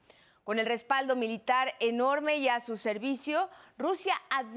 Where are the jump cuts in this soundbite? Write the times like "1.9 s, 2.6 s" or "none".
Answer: none